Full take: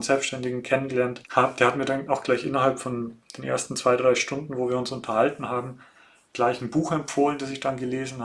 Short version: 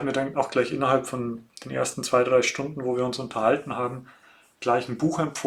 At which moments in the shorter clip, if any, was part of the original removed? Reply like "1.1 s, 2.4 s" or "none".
none